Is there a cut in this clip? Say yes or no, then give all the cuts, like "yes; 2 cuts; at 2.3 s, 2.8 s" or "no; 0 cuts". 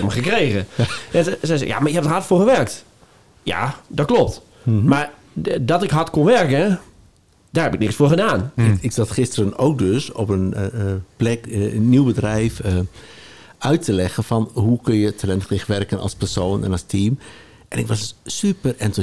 yes; 1 cut; at 8.6 s